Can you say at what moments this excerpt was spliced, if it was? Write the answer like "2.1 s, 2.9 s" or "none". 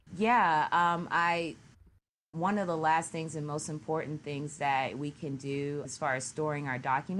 5.8 s